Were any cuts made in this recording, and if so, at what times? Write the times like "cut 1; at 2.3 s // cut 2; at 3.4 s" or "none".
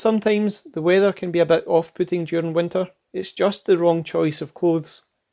cut 1; at 3.0 s